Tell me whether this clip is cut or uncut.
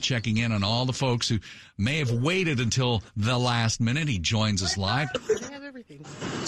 cut